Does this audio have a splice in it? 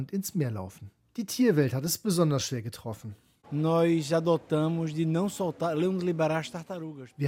yes; 2 cuts; at 1.0 s, 3.4 s

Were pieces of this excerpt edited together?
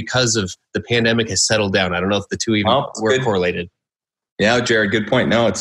no; 0 cuts

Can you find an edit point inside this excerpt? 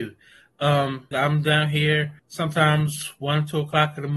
yes; 2 cuts; at 1.1 s, 2.2 s

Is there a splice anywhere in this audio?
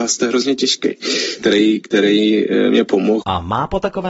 yes; 1 cut; at 1.4 s

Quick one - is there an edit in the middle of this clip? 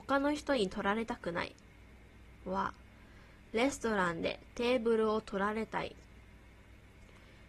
no; 0 cuts

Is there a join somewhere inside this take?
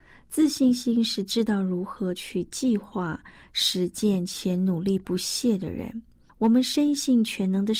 yes; 1 cut; at 6.3 s

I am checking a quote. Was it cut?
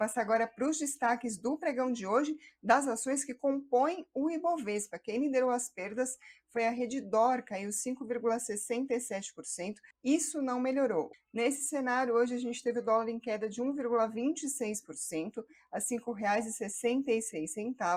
yes; 2 cuts; at 9.9 s, 11.1 s

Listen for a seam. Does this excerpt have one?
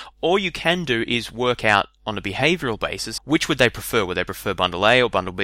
yes; 1 cut; at 3.2 s

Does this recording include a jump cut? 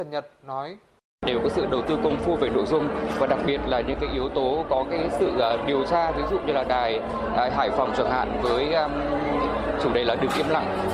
no; 0 cuts

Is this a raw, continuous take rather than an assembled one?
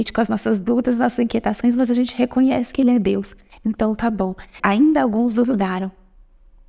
no; 1 cut; at 4.6 s

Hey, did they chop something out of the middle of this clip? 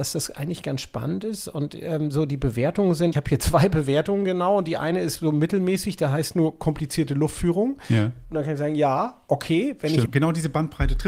yes; 2 cuts; at 3.1 s, 10.1 s

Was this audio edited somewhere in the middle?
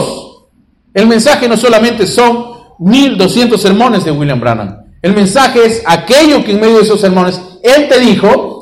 no; 0 cuts

